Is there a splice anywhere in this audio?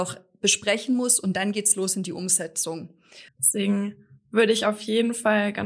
yes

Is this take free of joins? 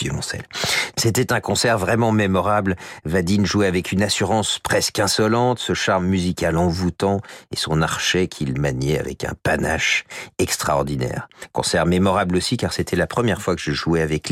yes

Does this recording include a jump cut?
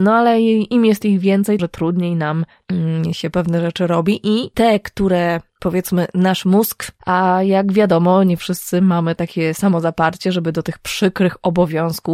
yes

